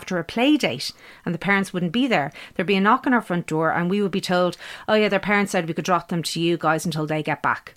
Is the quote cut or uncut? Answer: uncut